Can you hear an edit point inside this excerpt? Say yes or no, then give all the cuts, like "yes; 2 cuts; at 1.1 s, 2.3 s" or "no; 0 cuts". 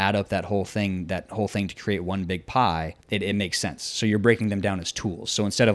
yes; 1 cut; at 3.0 s